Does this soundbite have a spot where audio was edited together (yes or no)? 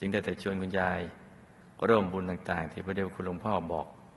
no